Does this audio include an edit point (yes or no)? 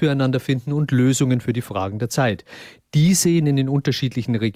no